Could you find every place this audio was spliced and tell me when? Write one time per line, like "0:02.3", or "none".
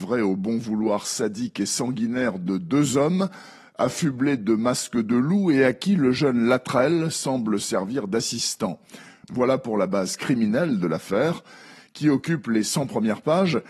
0:09.2

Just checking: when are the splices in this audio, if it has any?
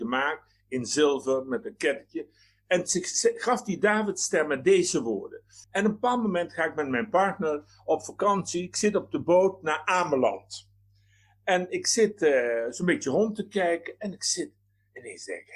0:05.6

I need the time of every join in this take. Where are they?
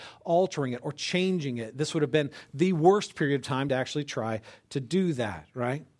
none

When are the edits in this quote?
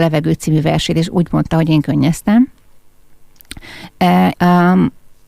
0:04.3

